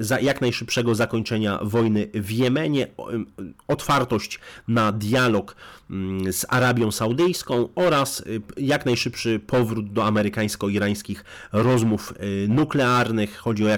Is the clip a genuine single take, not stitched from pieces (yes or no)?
yes